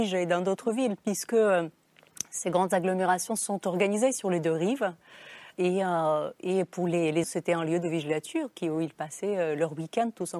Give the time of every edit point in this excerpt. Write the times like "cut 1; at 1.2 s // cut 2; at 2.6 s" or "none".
cut 1; at 5.5 s // cut 2; at 7.2 s